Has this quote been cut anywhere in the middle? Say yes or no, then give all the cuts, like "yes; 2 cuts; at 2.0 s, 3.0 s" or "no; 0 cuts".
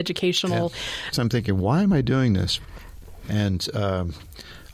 yes; 2 cuts; at 1.1 s, 3.2 s